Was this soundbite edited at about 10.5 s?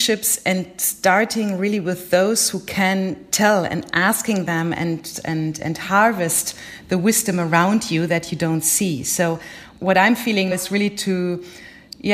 yes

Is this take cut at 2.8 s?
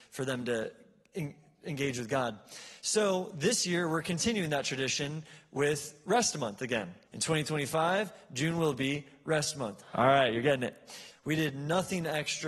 no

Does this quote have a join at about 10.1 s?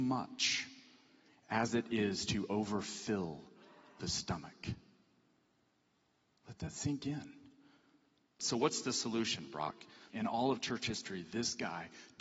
yes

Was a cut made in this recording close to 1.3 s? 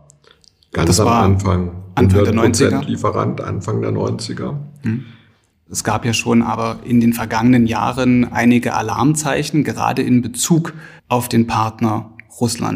no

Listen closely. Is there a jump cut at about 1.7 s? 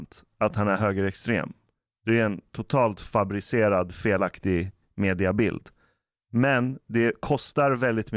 no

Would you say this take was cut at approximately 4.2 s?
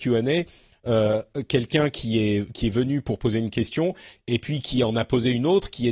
yes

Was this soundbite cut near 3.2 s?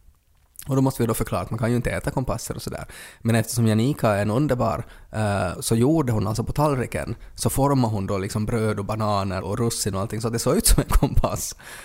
no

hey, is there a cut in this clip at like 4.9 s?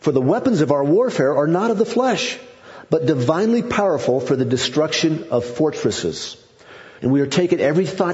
no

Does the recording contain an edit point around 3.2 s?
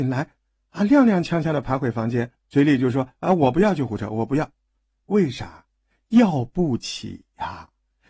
no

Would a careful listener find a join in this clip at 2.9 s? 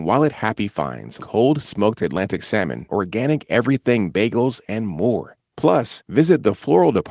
yes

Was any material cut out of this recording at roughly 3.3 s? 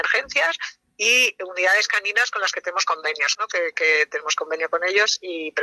yes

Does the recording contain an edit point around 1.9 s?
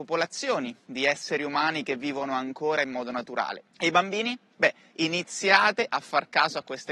no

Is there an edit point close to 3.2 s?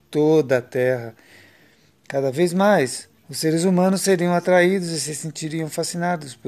yes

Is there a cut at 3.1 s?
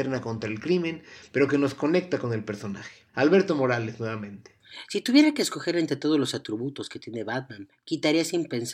yes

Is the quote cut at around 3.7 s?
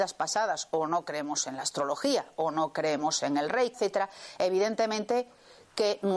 yes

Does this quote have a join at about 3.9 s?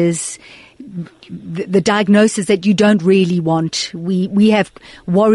no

